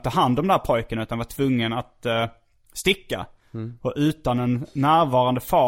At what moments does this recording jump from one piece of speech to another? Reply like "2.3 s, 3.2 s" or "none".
none

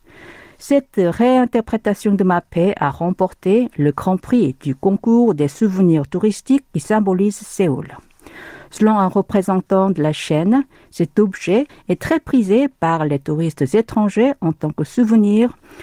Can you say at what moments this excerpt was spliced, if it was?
11.7 s

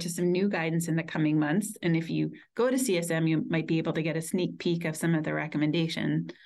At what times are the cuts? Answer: none

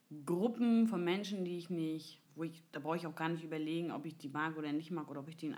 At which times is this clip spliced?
2.3 s

